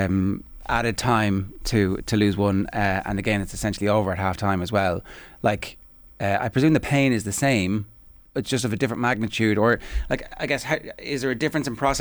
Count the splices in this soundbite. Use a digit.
0